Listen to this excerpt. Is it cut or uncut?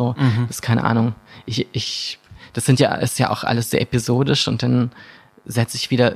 uncut